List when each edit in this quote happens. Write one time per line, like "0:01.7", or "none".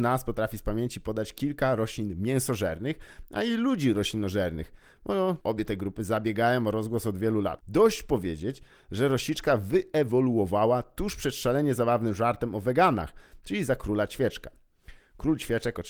0:05.4